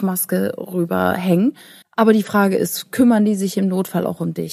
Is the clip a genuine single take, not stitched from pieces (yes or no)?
no